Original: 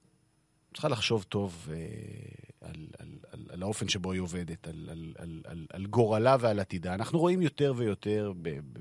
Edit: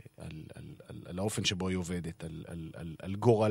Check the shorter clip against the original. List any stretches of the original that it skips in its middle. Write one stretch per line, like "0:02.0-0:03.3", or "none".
0:04.9-0:05.1